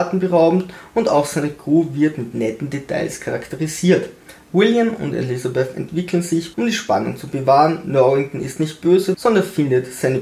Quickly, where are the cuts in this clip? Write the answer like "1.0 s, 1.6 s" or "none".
6.5 s, 9.1 s